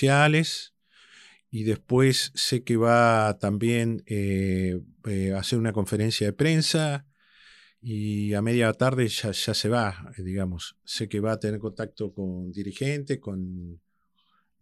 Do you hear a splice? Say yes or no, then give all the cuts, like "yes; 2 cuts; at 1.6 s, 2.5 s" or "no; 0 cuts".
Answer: no; 0 cuts